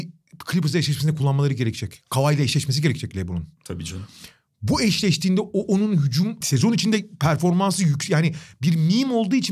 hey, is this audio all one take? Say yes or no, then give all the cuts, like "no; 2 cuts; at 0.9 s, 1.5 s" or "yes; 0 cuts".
no; 1 cut; at 6.4 s